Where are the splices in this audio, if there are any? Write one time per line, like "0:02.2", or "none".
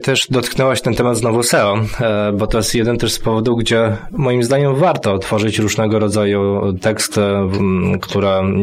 none